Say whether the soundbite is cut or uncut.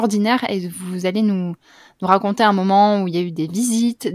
uncut